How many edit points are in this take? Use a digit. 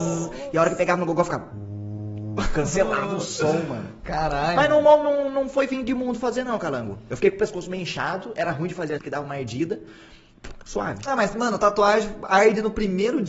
1